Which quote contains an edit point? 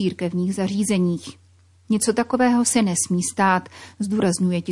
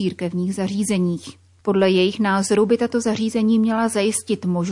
second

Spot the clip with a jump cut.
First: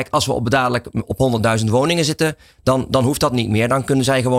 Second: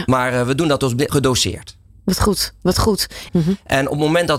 second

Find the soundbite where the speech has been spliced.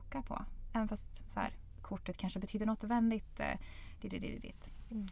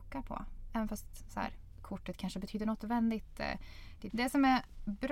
second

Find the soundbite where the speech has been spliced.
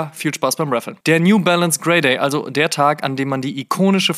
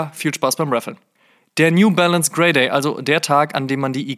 first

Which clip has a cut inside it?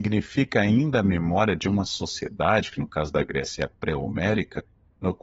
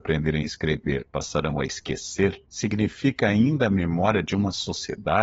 second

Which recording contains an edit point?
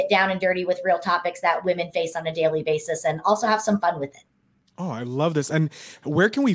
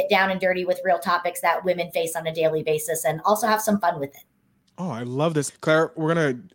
second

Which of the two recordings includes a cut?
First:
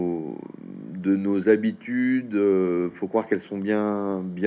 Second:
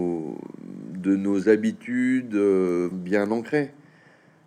second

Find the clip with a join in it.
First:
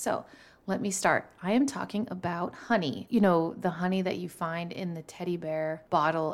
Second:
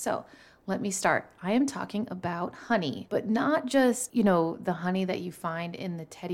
first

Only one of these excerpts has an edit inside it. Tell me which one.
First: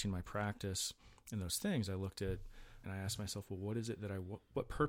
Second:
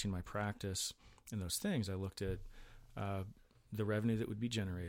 first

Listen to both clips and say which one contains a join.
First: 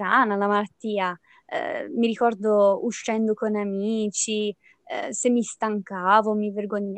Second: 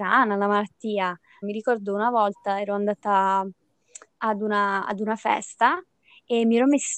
second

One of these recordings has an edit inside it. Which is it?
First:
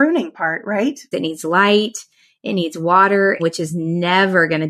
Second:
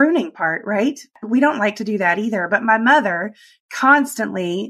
first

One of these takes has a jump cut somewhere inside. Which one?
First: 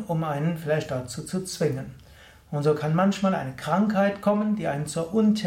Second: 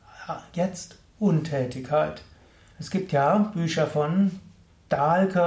second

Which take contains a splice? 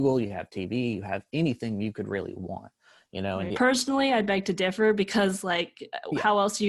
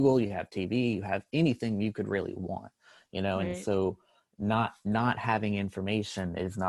first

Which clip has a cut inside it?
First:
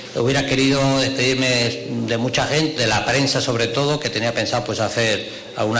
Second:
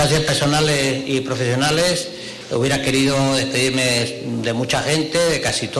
first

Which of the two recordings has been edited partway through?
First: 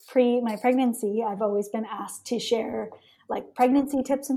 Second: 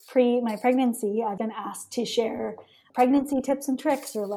second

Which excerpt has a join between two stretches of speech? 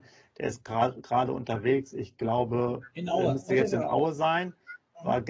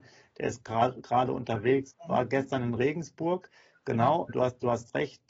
second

